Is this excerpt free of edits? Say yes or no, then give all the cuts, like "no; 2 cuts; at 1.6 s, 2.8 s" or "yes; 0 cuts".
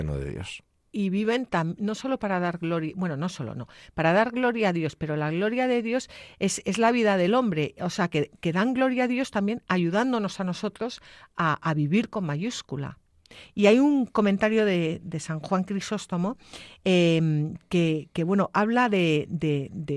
yes; 0 cuts